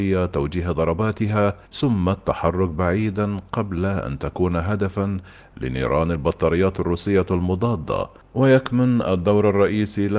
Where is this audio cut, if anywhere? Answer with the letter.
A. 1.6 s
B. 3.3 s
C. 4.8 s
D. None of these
A